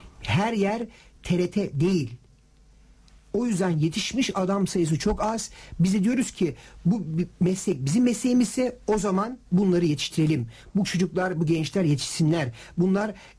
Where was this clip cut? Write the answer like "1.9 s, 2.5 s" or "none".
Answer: 9.5 s

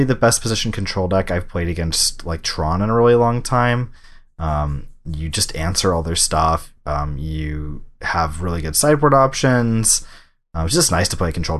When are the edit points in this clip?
none

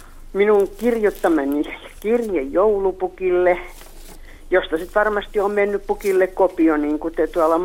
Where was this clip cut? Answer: none

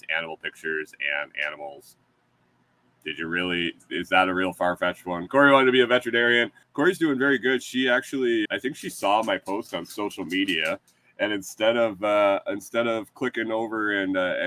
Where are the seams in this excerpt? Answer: 5.3 s, 6.6 s, 8.5 s

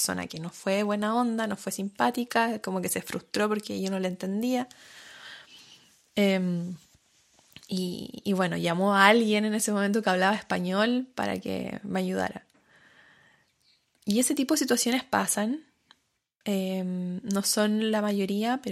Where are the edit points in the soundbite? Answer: none

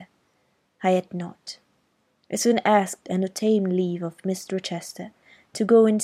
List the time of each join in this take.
none

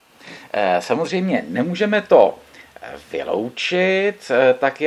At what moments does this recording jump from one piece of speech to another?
none

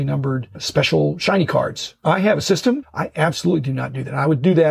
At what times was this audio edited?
2.8 s

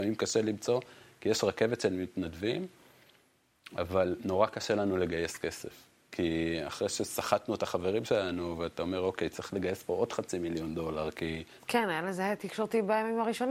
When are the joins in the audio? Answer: 11.6 s

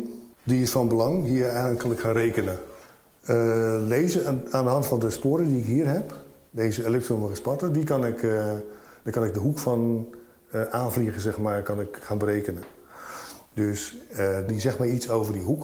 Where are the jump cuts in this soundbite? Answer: 14.5 s

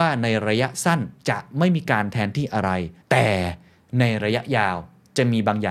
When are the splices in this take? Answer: 1.2 s, 3.0 s

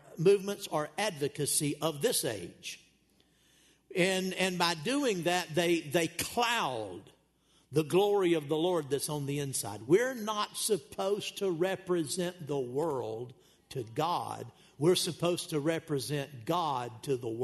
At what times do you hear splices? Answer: none

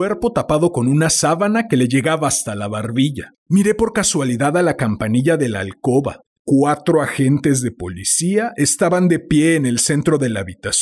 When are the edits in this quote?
3.4 s, 6.4 s

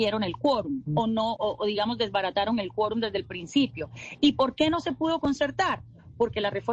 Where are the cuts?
1.4 s

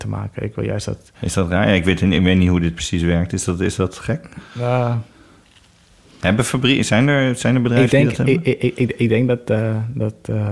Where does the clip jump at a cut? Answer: none

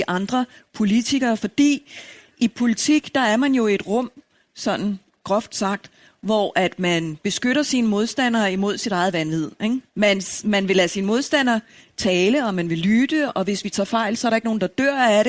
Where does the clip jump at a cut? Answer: 9.9 s, 13.3 s

